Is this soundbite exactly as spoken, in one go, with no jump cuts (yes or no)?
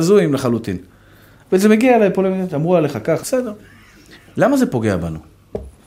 no